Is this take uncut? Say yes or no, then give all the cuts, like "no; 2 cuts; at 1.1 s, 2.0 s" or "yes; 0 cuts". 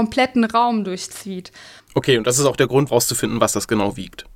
no; 2 cuts; at 1.8 s, 2.9 s